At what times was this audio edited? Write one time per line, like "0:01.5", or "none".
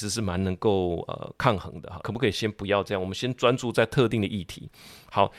0:02.0